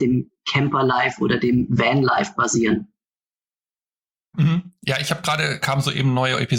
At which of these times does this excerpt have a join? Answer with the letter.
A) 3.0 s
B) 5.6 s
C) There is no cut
B